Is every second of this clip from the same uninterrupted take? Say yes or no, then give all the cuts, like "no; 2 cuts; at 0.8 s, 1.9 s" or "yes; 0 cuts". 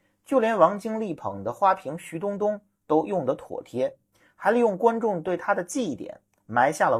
yes; 0 cuts